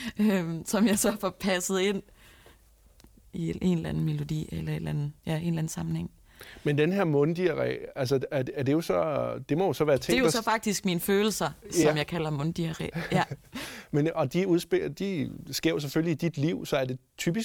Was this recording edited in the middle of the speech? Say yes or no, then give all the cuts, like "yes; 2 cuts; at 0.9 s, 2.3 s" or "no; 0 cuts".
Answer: no; 0 cuts